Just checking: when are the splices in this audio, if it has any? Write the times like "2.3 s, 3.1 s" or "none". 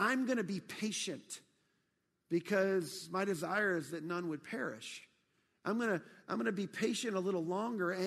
none